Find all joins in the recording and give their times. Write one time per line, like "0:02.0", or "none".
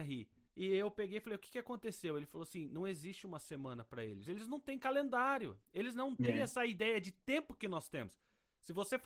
none